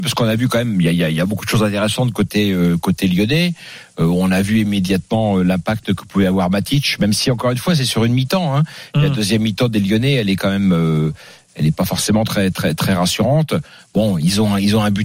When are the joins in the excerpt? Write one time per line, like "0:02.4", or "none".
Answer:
none